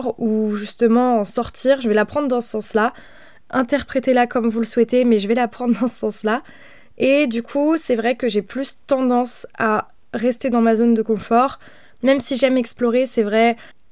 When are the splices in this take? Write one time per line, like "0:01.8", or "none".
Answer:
none